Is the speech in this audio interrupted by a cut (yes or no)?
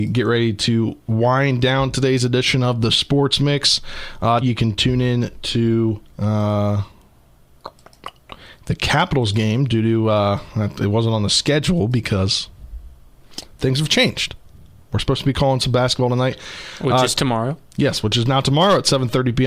yes